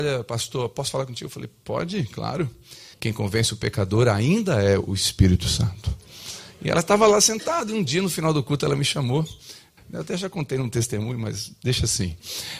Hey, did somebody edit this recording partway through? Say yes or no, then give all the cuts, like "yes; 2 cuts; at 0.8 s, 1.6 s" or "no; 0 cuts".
yes; 2 cuts; at 2.9 s, 9.8 s